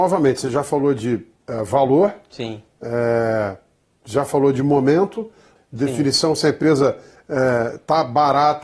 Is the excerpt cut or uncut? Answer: cut